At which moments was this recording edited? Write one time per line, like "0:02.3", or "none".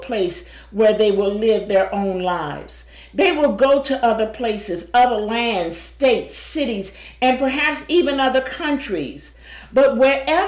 none